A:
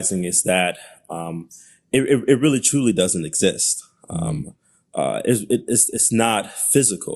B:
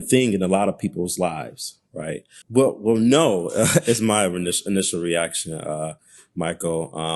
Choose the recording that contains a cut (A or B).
B